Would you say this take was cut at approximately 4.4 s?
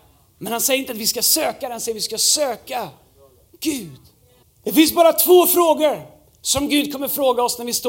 yes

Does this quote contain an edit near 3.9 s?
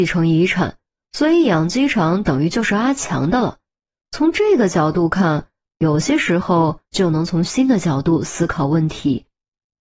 no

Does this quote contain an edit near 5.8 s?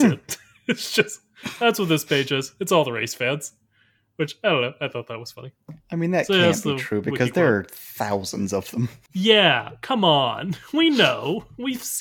yes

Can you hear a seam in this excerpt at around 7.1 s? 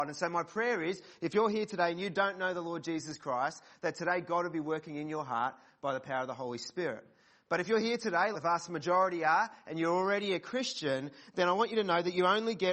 no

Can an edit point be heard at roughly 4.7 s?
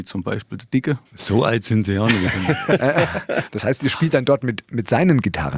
no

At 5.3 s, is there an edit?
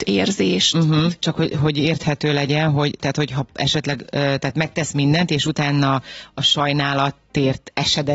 no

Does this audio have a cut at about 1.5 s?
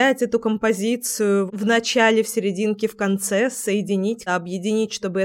yes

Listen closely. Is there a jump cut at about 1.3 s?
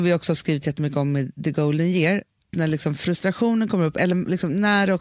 no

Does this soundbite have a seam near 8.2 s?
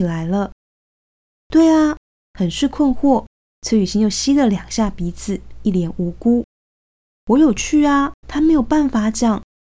yes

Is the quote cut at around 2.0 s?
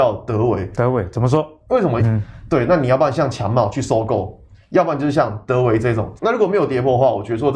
yes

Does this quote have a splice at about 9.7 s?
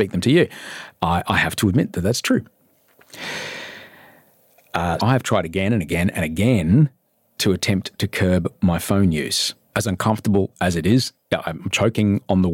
yes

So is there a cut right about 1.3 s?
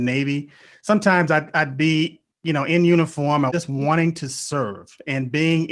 no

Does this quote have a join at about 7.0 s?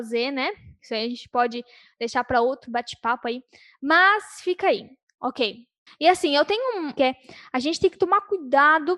yes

